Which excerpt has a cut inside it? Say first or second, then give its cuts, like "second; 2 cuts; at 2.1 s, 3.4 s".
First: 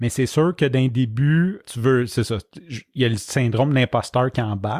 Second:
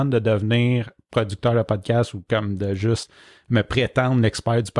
first; 1 cut; at 1.6 s